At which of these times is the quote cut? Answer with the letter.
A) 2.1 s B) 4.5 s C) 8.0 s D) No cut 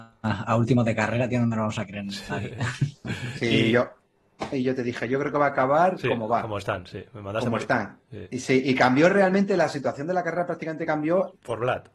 B